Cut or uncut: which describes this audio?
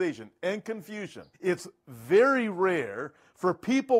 cut